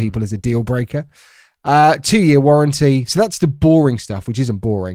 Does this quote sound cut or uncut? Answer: uncut